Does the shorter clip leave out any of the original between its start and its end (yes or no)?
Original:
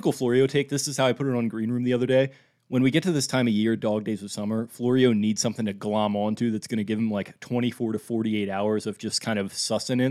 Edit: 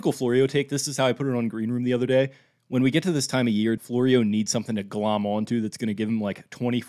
yes